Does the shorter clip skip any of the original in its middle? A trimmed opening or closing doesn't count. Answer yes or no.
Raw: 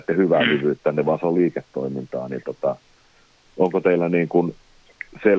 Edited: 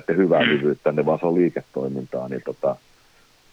no